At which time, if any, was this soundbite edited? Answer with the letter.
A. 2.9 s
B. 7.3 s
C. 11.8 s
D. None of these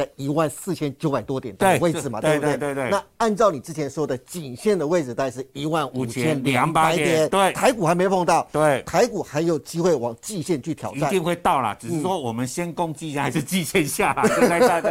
B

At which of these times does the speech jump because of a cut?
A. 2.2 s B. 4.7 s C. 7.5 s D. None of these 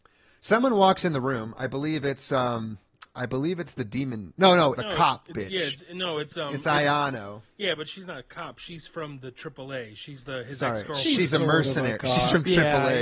B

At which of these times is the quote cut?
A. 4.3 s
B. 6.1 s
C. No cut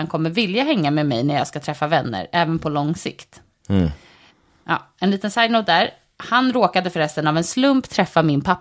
C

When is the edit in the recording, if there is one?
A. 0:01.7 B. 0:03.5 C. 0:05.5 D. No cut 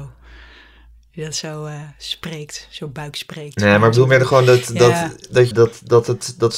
C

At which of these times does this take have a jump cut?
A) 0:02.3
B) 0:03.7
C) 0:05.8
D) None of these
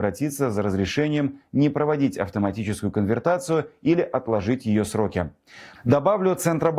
C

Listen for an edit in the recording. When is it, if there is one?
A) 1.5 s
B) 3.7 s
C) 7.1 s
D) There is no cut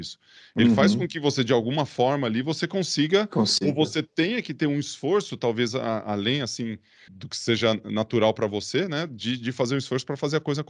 C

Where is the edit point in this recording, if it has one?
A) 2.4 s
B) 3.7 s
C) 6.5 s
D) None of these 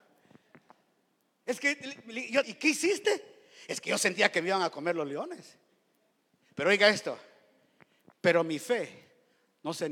A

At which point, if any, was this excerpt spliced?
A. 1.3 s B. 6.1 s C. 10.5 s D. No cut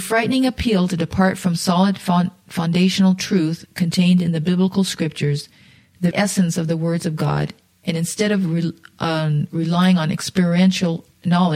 B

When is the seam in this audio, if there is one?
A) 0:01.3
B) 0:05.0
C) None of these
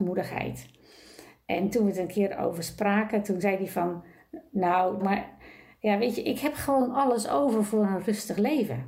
B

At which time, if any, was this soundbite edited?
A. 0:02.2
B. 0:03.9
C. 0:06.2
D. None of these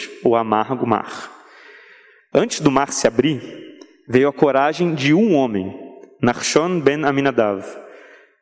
A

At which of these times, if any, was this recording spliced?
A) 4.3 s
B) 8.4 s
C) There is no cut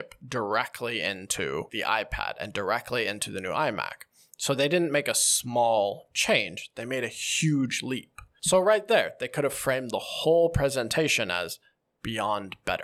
C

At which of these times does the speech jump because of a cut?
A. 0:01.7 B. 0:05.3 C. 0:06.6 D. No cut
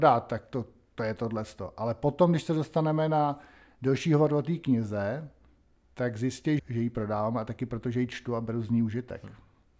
C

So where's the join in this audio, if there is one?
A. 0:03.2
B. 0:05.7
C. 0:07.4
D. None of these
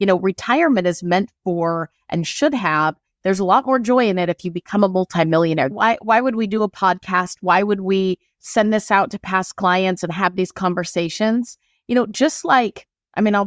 B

